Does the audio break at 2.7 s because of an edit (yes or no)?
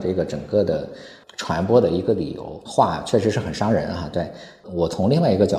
yes